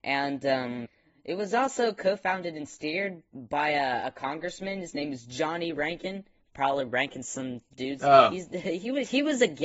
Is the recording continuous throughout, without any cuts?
yes; 0 cuts

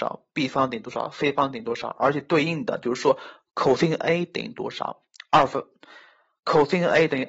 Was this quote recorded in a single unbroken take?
yes; 0 cuts

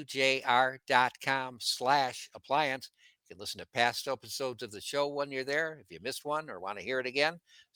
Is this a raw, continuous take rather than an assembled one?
yes; 0 cuts

